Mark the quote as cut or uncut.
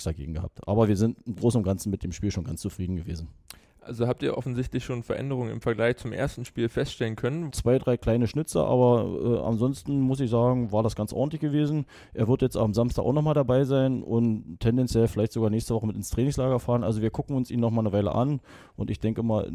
cut